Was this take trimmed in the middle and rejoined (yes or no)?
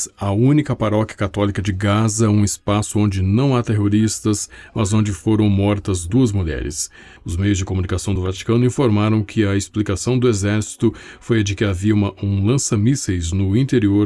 yes